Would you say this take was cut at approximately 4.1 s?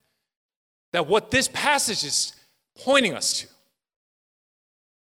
no; 0 cuts

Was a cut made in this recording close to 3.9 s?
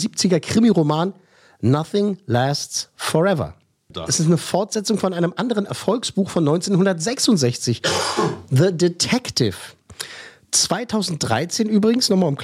yes; 1 cut; at 3.9 s

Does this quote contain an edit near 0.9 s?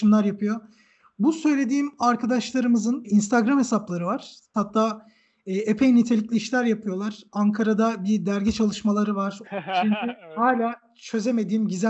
no; 3 cuts; at 3.0 s, 4.5 s, 9.4 s

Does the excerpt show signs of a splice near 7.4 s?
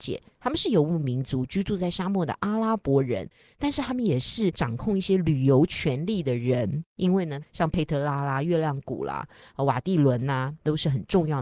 yes; 1 cut; at 7.4 s

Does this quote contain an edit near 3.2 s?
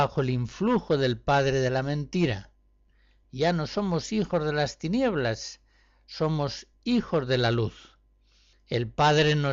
yes; 1 cut; at 3.2 s

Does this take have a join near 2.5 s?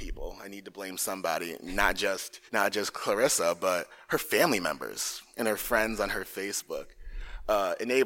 yes; 1 cut; at 2.5 s

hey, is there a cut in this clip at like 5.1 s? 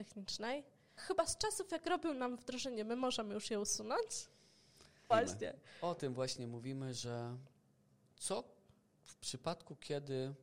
yes; 2 cuts; at 1.0 s, 5.1 s

